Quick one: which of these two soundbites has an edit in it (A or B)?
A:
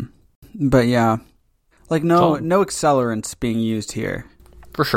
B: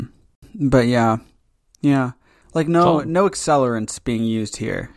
A